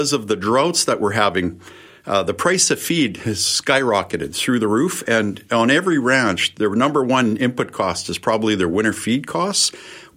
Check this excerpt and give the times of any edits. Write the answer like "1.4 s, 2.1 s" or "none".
none